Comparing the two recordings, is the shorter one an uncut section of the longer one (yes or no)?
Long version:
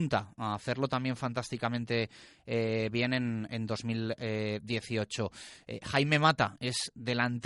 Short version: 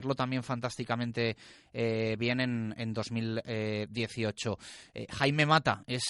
yes